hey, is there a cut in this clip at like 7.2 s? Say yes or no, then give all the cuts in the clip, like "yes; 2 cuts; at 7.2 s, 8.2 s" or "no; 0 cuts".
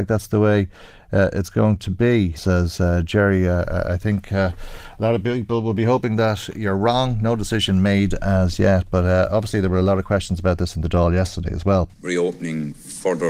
no; 1 cut; at 2.4 s